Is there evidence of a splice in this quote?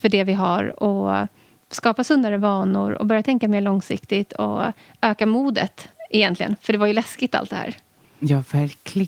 no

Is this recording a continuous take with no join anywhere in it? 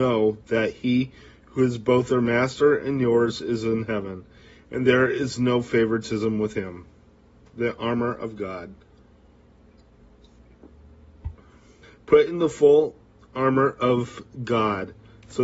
no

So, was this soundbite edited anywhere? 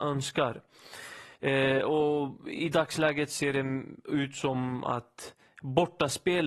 yes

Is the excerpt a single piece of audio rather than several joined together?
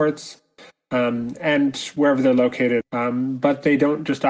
no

